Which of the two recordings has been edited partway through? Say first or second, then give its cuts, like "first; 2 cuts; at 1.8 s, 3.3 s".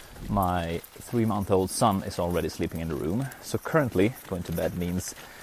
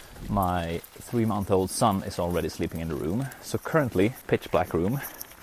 second; 1 cut; at 4.2 s